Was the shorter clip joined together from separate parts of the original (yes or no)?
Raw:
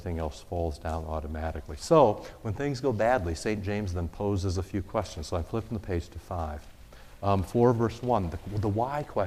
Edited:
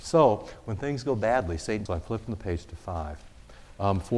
yes